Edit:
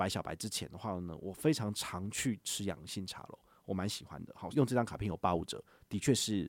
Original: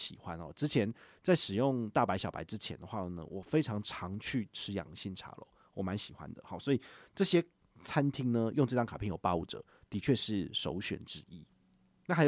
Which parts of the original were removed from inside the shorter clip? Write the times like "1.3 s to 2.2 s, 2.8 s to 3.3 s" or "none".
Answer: 6.6 s to 8.5 s